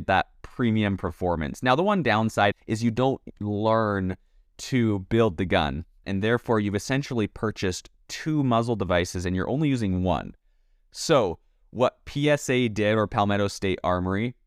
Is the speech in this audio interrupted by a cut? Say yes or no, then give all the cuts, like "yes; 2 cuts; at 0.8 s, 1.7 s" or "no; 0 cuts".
yes; 2 cuts; at 2.5 s, 6.0 s